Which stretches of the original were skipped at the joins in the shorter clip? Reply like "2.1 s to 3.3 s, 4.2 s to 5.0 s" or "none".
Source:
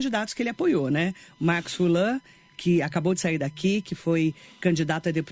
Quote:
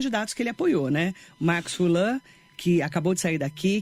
none